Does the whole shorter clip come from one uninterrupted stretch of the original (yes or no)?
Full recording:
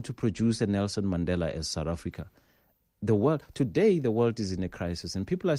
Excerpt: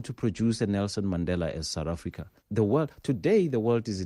no